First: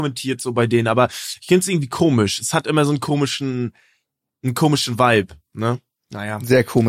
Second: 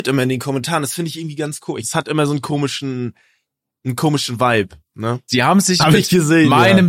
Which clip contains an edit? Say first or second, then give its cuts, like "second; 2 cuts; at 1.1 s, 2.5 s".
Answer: second; 2 cuts; at 1.8 s, 5.3 s